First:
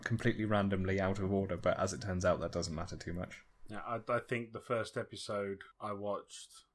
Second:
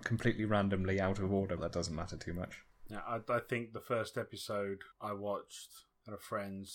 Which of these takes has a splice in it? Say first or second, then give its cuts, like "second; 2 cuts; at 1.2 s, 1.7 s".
second; 1 cut; at 1.6 s